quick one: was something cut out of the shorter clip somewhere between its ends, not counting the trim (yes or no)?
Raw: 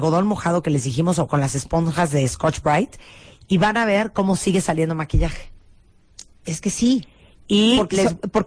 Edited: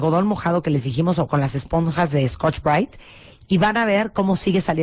no